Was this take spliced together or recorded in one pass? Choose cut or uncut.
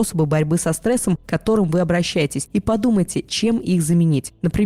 uncut